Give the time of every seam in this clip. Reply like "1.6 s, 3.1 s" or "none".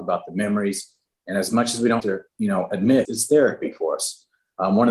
2.0 s, 3.1 s